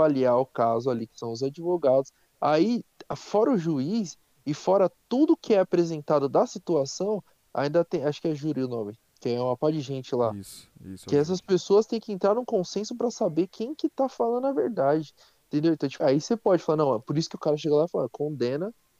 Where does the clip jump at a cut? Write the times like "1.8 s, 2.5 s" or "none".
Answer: 16.0 s